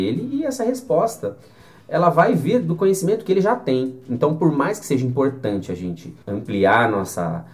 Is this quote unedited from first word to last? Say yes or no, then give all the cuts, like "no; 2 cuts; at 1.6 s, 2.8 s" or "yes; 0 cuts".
no; 1 cut; at 6.2 s